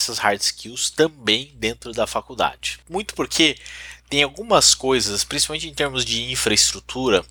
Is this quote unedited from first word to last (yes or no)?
no